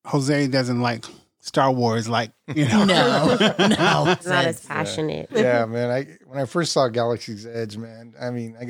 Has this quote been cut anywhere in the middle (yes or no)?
yes